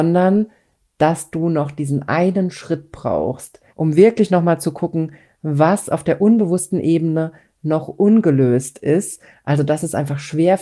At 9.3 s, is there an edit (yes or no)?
yes